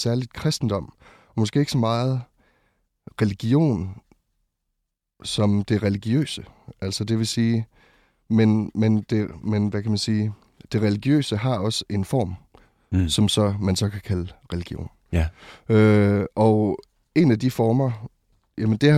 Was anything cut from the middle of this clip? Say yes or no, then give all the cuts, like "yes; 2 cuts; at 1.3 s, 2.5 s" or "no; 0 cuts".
no; 0 cuts